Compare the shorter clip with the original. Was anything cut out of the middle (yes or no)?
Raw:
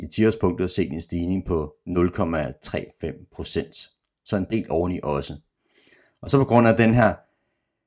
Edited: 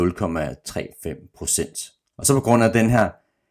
yes